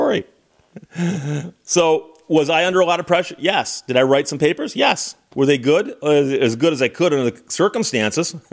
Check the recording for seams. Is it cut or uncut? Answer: uncut